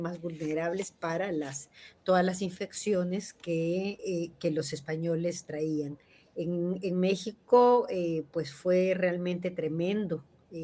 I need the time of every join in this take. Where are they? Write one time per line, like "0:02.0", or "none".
0:04.0